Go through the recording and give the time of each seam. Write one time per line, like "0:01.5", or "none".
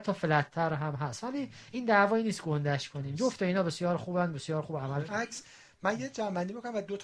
0:05.1